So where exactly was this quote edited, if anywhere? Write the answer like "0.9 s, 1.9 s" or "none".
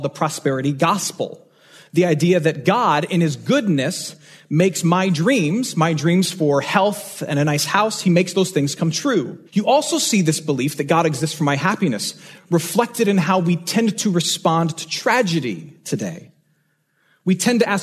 9.5 s